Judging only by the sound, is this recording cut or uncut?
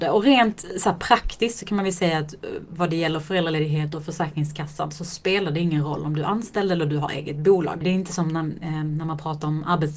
cut